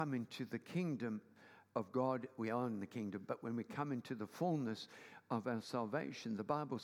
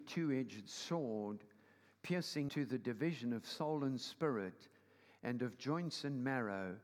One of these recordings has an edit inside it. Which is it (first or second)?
second